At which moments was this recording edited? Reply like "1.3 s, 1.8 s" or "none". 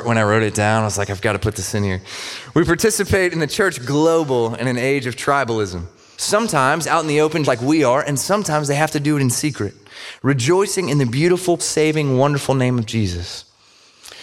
6.1 s, 7.5 s, 11.6 s